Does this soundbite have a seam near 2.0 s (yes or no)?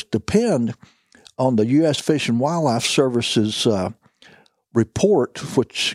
no